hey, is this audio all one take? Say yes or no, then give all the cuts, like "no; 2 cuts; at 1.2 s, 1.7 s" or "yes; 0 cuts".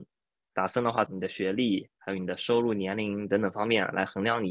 no; 1 cut; at 1.1 s